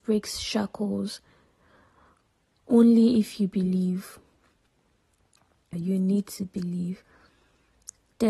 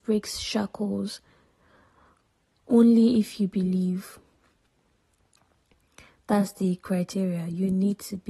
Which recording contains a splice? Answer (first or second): first